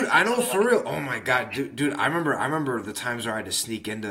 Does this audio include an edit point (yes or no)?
no